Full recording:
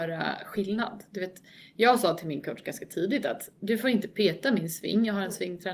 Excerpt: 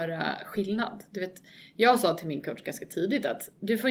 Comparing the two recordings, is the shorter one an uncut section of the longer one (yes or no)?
yes